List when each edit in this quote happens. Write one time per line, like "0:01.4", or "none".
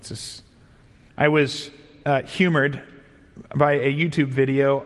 0:01.1